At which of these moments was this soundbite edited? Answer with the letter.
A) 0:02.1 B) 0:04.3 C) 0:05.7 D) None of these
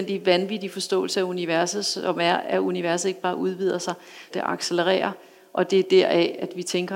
B